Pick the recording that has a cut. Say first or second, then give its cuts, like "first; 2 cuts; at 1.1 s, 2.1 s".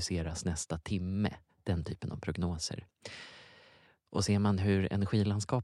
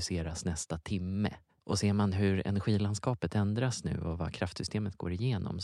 second; 1 cut; at 1.6 s